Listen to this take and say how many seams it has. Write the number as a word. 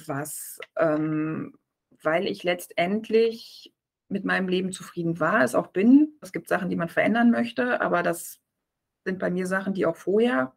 one